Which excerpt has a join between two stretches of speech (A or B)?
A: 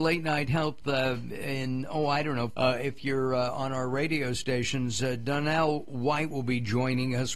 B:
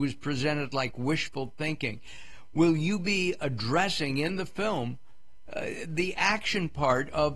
A